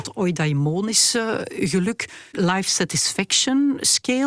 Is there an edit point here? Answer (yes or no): no